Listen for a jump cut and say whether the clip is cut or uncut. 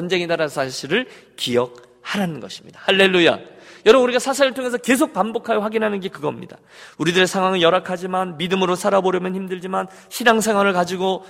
uncut